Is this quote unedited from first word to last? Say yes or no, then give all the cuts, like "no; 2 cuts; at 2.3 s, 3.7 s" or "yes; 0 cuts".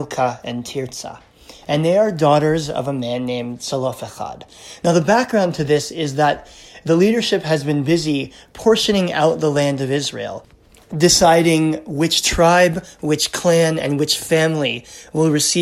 yes; 0 cuts